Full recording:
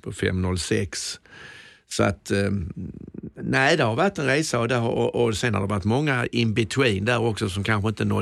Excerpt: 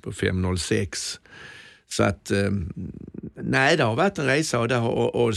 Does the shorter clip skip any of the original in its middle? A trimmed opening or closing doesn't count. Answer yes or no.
no